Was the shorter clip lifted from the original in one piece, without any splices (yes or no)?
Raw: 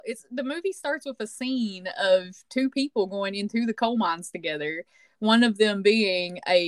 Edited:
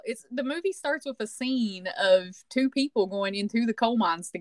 yes